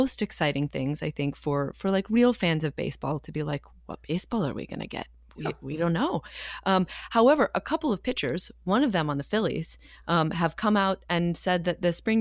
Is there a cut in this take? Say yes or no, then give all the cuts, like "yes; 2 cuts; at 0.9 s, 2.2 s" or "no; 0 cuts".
no; 0 cuts